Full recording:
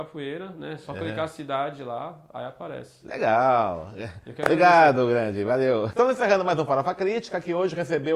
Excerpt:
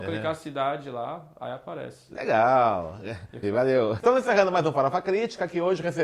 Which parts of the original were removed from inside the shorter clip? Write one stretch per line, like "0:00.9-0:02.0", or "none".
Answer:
0:04.4-0:05.4